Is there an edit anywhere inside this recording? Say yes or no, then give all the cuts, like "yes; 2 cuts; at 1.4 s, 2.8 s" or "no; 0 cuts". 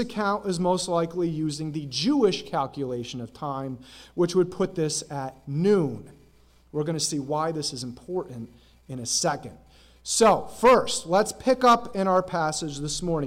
no; 0 cuts